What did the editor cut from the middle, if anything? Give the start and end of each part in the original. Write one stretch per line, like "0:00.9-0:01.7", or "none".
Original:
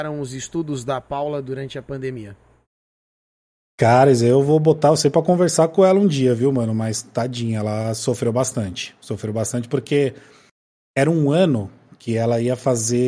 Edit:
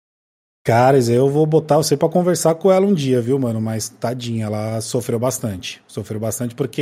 none